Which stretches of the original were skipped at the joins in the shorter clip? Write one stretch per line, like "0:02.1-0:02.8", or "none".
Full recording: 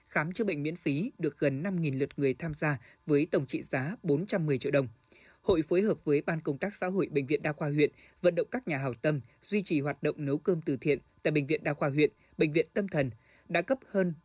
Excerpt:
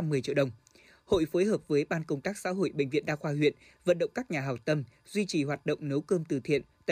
none